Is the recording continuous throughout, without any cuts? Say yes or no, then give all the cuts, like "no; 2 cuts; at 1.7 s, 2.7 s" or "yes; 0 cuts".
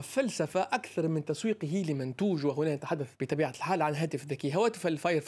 no; 1 cut; at 3.1 s